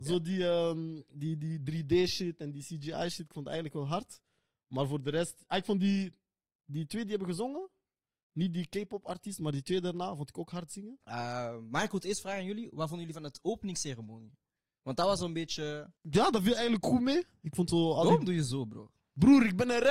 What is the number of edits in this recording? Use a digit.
2